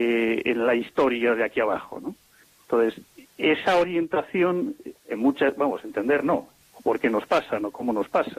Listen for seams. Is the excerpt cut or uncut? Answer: cut